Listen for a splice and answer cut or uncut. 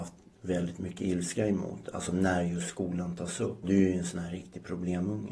cut